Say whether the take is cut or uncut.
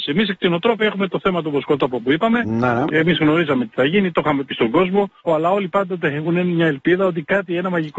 cut